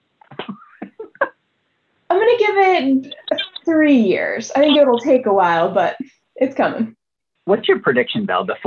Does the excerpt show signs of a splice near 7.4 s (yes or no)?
yes